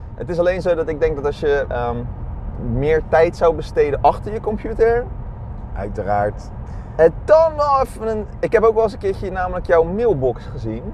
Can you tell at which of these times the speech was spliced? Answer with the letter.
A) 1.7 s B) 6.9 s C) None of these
A